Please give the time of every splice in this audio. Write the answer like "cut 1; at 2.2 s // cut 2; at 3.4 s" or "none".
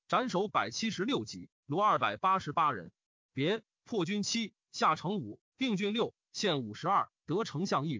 none